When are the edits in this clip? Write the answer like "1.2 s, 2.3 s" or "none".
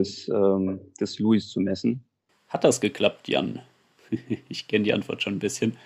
2.3 s

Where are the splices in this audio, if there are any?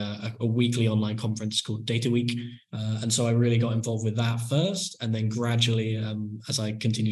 2.7 s

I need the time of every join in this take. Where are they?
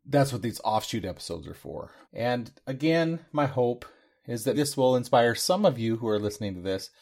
2.0 s, 4.5 s

